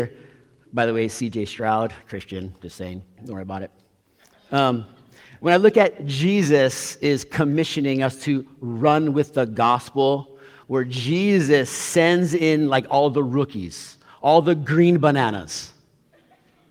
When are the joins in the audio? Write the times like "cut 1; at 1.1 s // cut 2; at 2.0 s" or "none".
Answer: cut 1; at 3.2 s // cut 2; at 10.6 s